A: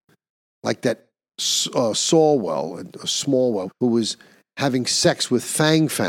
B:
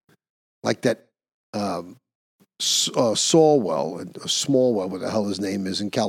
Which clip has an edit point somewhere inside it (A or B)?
A